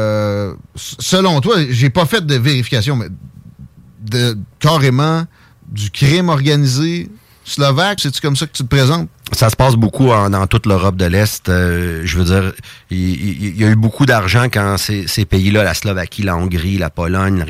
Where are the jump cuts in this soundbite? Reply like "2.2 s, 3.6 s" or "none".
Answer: 8.0 s

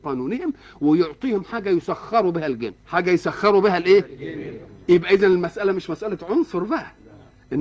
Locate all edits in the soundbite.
2.8 s

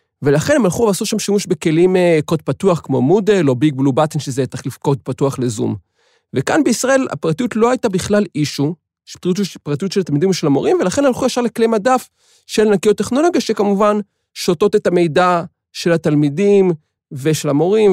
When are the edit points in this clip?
none

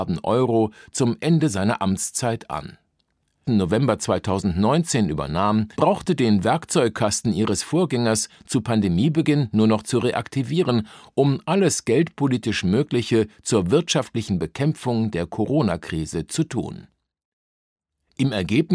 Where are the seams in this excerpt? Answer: 3.4 s, 5.7 s

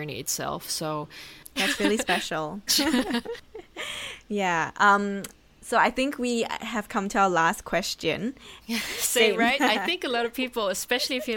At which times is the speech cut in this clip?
2.7 s, 8.6 s

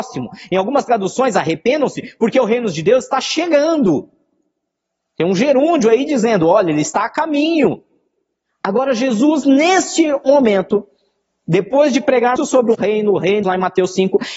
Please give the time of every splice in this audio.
12.4 s, 13.4 s

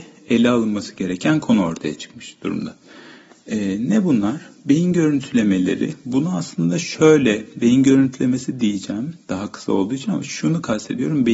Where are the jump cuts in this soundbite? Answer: none

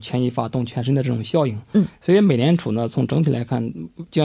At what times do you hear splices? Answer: none

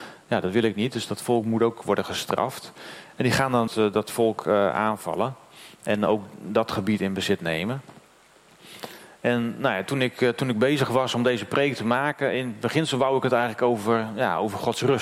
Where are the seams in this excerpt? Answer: 3.7 s

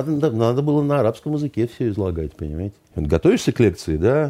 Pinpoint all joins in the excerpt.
2.8 s

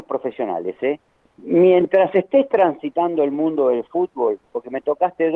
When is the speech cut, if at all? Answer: 1.2 s, 4.4 s

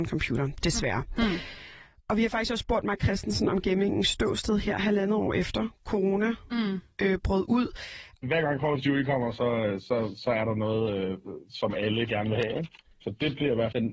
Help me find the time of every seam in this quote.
8.2 s

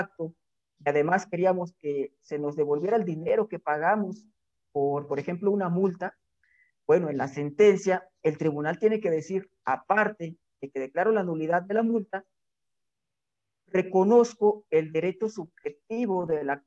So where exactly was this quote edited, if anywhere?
none

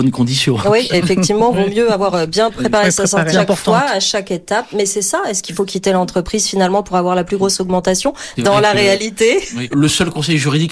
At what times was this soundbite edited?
3.3 s, 8.4 s, 9.7 s

